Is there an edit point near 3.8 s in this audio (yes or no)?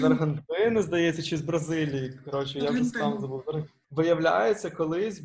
yes